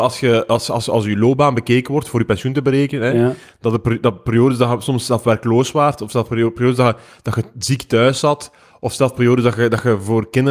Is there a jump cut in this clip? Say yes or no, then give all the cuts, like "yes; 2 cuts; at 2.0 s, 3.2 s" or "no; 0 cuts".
no; 0 cuts